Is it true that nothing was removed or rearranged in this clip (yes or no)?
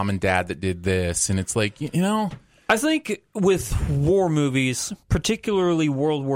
yes